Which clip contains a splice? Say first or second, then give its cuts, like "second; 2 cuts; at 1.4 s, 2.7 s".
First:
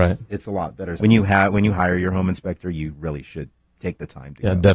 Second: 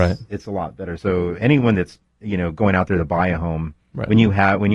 first; 1 cut; at 1.0 s